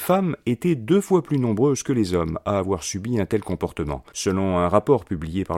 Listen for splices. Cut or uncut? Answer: cut